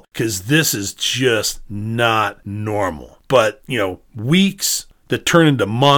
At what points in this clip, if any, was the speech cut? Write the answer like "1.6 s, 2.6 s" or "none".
3.2 s

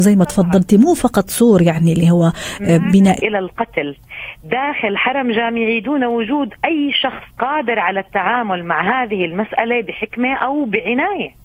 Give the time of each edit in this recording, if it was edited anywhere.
3.2 s, 7.3 s

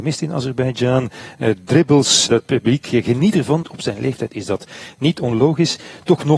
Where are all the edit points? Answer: 2.3 s, 3.6 s

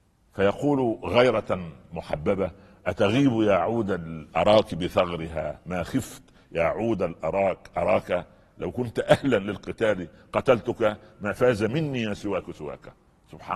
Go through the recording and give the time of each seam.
none

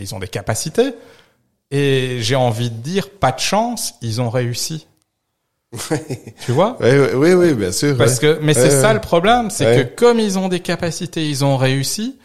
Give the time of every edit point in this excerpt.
none

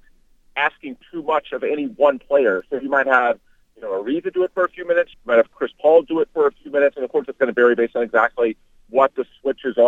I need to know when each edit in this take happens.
5.1 s

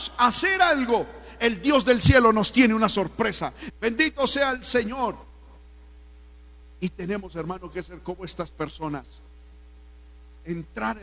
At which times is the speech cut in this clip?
3.7 s

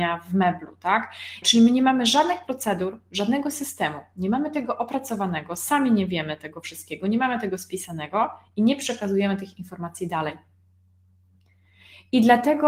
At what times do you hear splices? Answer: 1.4 s

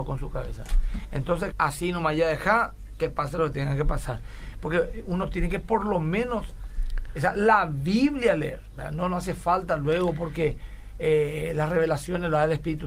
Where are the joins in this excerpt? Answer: 1.5 s

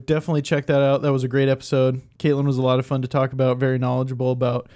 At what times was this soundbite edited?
none

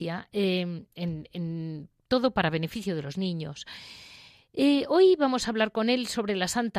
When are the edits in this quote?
none

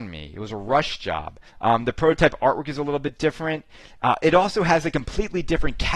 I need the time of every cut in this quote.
1.5 s

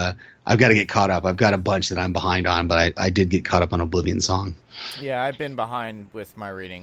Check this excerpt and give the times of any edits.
none

